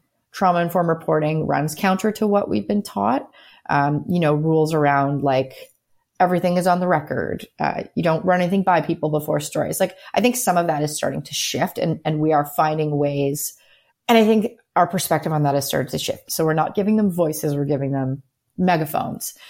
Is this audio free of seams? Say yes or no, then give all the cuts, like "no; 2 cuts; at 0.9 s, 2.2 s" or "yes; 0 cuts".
no; 2 cuts; at 13.9 s, 16.3 s